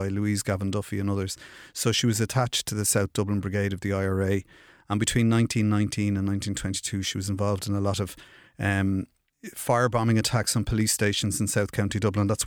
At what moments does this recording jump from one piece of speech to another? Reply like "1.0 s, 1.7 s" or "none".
none